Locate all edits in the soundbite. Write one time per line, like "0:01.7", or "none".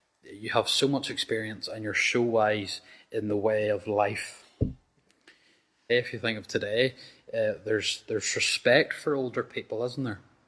0:05.9